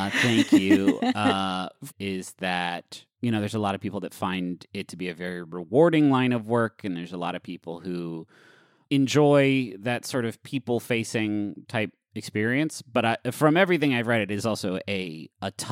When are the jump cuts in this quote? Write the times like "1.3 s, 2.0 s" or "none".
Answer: 1.9 s